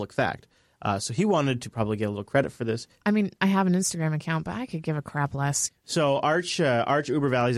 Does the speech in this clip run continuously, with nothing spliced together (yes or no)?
no